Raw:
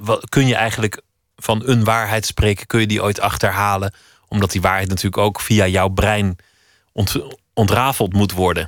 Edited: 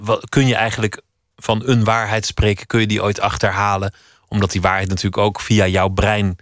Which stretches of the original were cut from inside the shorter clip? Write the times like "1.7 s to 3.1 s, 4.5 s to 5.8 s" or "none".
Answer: none